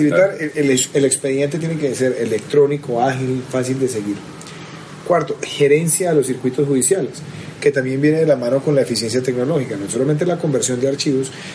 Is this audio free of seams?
yes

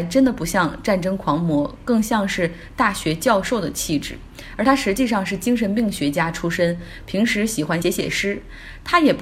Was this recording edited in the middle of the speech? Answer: yes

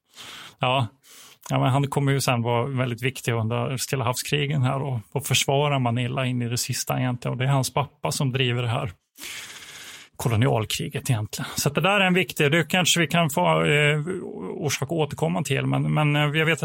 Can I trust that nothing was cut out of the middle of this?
yes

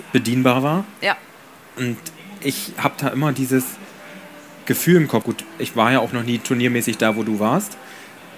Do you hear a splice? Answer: yes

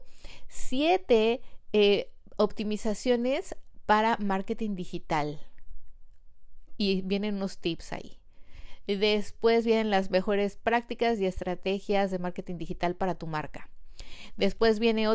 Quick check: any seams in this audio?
no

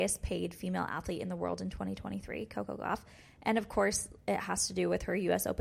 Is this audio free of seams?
yes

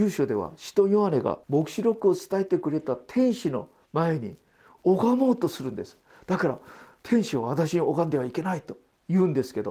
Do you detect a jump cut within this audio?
yes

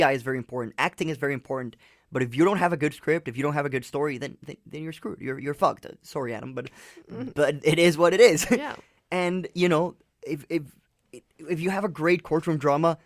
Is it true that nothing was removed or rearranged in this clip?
yes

